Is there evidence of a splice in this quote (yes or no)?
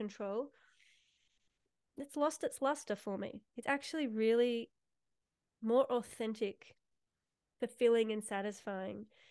no